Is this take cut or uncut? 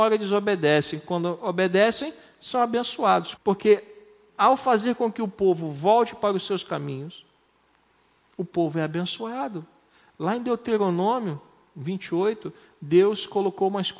cut